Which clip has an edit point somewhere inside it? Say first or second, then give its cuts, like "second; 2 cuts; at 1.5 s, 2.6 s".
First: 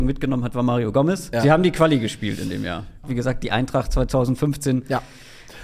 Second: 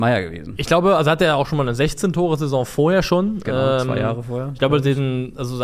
first; 2 cuts; at 1.3 s, 3.0 s